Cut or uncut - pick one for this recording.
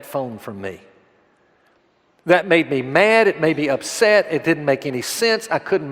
uncut